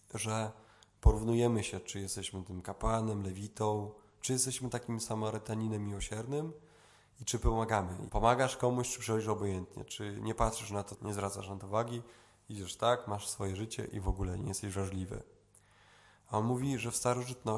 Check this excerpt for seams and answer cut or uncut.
cut